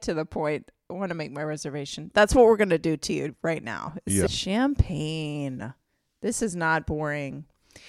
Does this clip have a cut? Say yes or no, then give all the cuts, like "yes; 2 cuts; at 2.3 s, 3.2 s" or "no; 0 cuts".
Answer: yes; 1 cut; at 4.3 s